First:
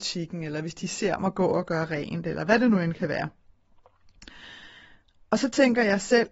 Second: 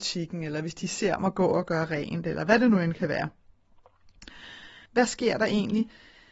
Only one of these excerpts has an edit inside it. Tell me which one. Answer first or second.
second